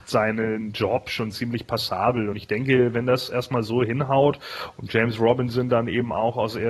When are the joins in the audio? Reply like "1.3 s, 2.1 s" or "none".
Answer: none